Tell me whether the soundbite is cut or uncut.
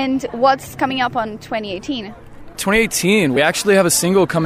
uncut